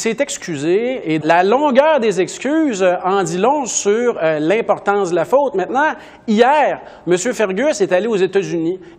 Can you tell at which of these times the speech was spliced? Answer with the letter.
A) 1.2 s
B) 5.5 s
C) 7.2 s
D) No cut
A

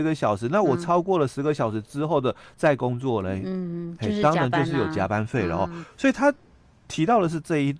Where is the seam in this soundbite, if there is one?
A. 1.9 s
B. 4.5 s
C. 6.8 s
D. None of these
D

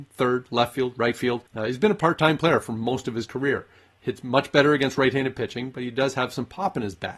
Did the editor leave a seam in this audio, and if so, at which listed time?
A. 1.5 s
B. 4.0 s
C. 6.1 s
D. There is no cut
A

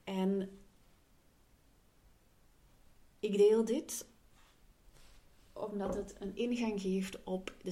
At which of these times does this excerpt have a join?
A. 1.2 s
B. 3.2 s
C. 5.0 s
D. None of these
D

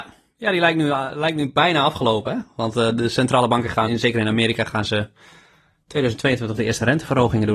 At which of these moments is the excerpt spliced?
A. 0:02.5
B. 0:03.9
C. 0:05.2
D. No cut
B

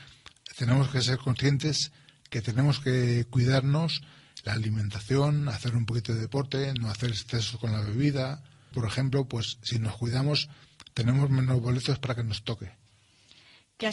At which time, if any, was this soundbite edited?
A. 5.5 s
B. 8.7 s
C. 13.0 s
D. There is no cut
B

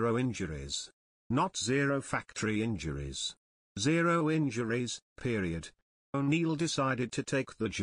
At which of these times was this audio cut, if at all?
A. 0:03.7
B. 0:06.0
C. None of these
B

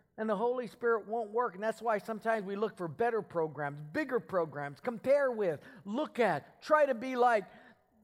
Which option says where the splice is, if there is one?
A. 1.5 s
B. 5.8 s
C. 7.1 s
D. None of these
D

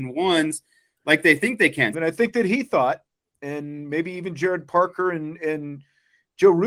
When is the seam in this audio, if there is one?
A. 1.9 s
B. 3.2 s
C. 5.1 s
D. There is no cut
A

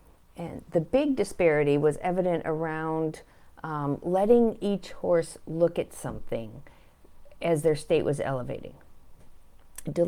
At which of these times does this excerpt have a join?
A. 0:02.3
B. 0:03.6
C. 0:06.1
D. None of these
D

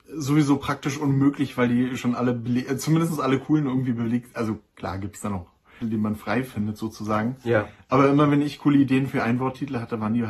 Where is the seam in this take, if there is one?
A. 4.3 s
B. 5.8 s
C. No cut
B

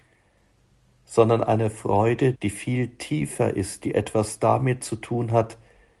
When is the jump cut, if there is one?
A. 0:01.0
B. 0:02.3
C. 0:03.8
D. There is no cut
B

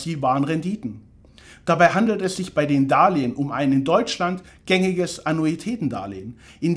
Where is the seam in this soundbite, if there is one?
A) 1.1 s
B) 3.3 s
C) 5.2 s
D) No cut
D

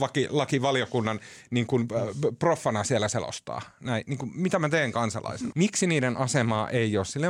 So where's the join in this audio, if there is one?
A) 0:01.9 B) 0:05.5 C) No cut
B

